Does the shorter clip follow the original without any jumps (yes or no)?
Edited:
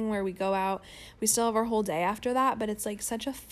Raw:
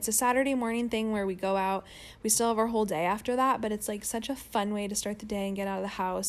yes